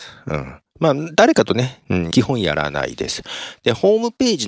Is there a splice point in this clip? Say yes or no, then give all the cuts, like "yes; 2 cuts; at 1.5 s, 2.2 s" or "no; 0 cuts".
yes; 1 cut; at 2.1 s